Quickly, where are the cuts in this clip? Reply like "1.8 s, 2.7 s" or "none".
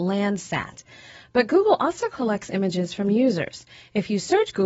none